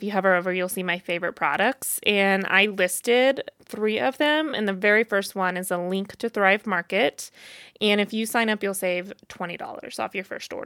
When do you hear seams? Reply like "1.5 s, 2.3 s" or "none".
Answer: none